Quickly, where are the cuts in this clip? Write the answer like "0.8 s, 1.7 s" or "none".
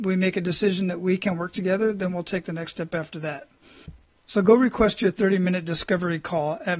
none